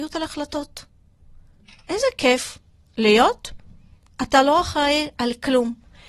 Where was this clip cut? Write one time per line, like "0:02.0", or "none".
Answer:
none